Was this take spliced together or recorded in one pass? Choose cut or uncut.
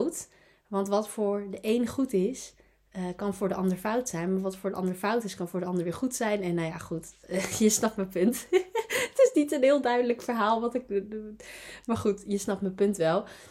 uncut